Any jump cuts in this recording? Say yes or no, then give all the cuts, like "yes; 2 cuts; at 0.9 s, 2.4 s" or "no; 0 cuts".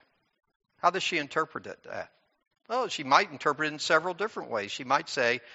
no; 0 cuts